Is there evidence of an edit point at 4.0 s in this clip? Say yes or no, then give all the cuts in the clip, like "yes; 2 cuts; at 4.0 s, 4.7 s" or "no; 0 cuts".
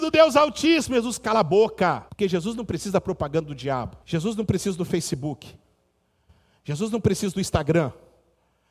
yes; 2 cuts; at 2.1 s, 4.0 s